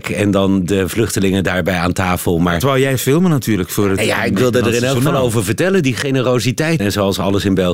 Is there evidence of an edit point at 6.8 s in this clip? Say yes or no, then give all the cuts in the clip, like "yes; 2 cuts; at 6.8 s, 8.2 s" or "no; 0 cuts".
yes; 1 cut; at 6.8 s